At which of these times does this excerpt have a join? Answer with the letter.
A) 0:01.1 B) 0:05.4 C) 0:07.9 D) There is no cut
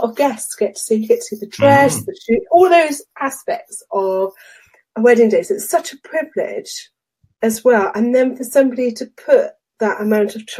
D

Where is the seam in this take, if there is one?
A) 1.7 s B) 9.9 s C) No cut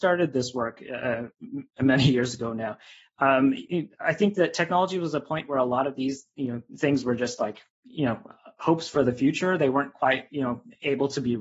C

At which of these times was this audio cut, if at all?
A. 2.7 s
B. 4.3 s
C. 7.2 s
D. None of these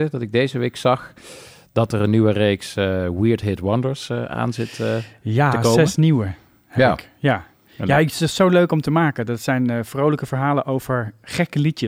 D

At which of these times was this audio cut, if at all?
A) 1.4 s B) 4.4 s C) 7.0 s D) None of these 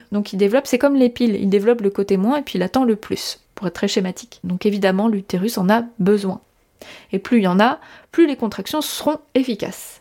B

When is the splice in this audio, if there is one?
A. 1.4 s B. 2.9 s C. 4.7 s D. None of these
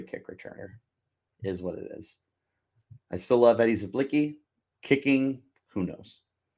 C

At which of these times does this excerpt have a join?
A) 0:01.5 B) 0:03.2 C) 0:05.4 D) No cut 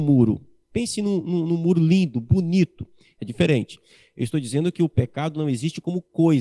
B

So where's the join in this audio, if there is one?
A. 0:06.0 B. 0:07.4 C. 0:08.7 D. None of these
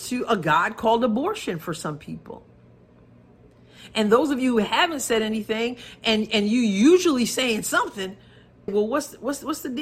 C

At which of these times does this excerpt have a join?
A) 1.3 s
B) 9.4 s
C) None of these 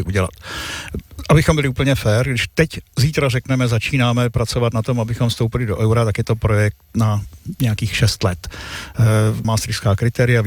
B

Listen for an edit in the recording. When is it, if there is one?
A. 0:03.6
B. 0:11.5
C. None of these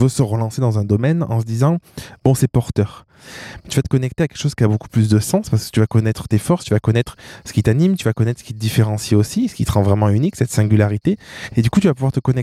A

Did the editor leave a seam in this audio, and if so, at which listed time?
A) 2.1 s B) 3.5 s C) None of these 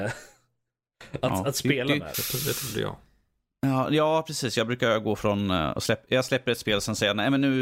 A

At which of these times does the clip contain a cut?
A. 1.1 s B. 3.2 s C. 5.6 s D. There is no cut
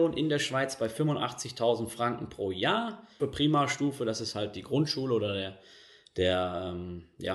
B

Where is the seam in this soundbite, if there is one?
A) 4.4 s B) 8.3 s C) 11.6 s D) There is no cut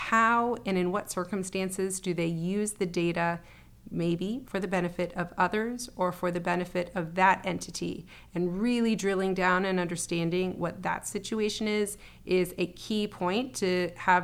A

